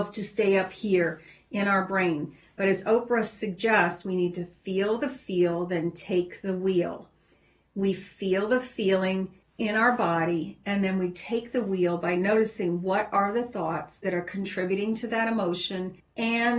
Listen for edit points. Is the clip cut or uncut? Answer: uncut